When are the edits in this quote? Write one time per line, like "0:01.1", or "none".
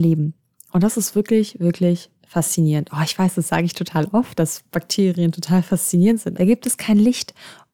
0:06.3